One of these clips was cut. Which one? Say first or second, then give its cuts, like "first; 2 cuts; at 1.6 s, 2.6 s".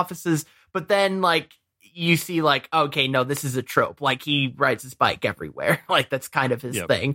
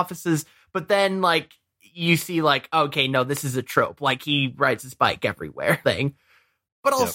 second; 1 cut; at 5.8 s